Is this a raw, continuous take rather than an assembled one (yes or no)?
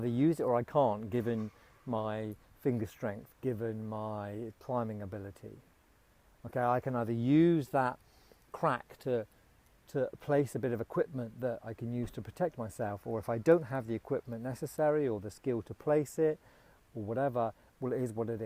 yes